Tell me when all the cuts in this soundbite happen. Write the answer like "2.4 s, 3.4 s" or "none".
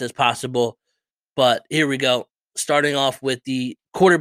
none